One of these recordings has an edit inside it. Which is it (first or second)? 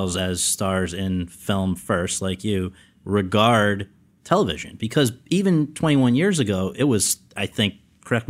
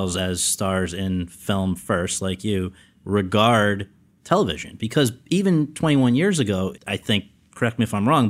second